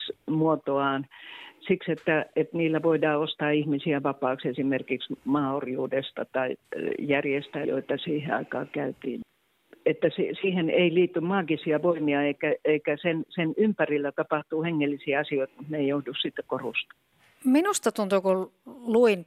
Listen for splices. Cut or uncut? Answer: cut